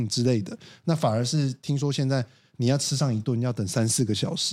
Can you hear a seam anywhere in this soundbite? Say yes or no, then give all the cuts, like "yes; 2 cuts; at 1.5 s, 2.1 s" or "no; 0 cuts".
no; 0 cuts